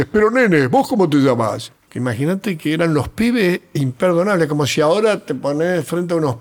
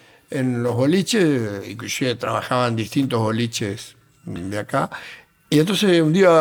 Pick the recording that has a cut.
first; 1 cut; at 1.9 s

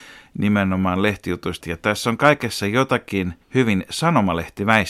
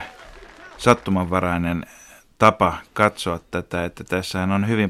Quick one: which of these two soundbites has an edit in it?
first; 2 cuts; at 1.6 s, 3.4 s

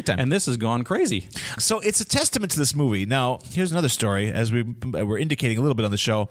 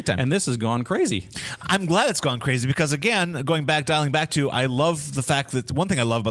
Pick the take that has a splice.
first; 1 cut; at 1.6 s

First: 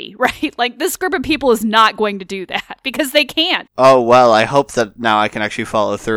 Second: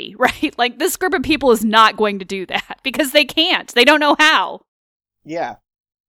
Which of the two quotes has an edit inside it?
first; 1 cut; at 3.7 s

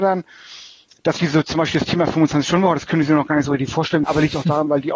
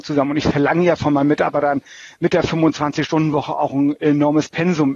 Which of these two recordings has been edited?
first; 1 cut; at 4.0 s

